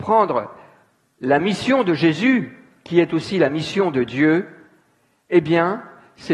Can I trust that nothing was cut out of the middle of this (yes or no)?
yes